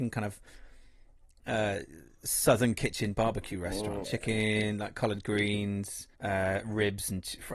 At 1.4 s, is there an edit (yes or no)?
no